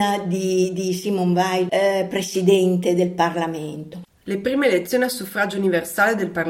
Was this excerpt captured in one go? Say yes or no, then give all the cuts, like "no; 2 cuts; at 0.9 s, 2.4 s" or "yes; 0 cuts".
no; 1 cut; at 4.1 s